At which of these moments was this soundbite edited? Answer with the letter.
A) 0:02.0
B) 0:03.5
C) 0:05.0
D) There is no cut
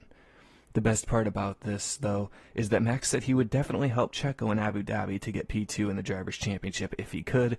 D